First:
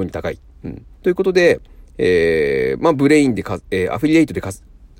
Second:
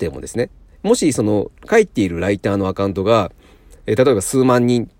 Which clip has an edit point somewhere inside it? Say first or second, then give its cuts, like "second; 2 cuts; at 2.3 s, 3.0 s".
first; 1 cut; at 0.9 s